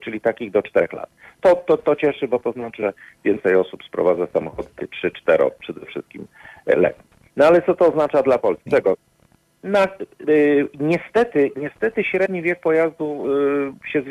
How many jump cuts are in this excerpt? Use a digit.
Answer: 1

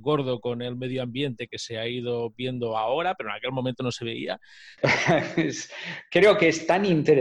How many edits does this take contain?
1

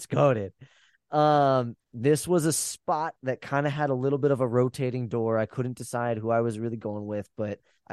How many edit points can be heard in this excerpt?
1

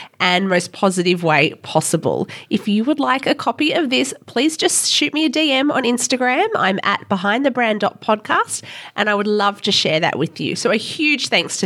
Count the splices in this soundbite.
0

